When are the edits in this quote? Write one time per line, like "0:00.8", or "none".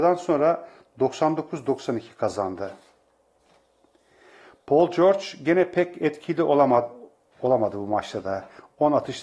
none